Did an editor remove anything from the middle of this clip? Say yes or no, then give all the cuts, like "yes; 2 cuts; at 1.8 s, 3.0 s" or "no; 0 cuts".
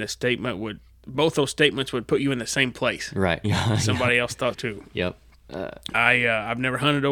yes; 3 cuts; at 3.4 s, 4.5 s, 5.9 s